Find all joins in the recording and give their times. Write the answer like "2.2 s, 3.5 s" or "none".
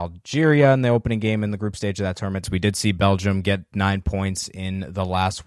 2.4 s